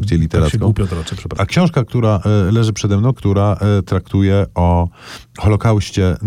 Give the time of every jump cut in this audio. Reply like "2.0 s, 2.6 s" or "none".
1.4 s, 3.1 s